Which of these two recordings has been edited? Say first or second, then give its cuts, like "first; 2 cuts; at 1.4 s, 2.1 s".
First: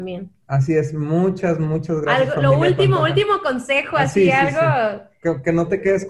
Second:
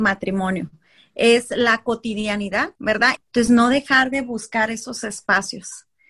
second; 1 cut; at 3.2 s